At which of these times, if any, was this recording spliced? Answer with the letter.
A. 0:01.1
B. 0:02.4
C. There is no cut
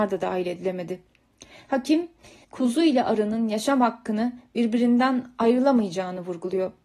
B